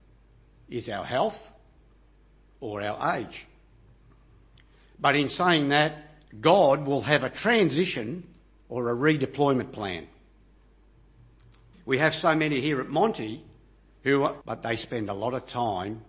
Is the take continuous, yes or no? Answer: no